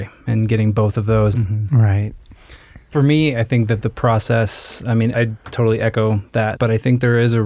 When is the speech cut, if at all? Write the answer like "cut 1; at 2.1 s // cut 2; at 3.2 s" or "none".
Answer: cut 1; at 1.3 s // cut 2; at 5.1 s // cut 3; at 6.5 s